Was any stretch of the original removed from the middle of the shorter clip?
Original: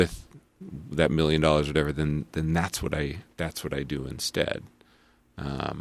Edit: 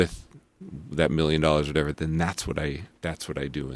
yes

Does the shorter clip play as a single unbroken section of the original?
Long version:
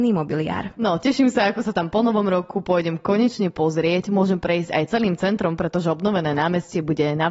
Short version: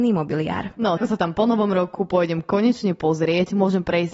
no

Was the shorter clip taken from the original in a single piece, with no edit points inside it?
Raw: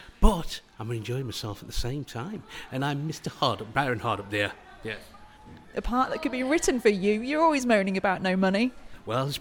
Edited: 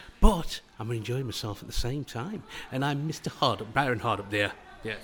yes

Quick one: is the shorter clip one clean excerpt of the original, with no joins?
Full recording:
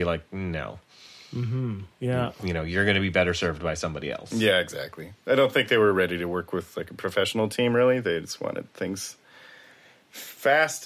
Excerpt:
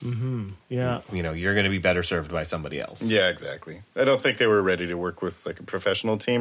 yes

